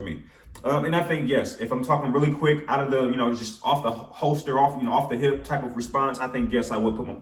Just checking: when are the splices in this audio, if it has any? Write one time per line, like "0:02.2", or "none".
none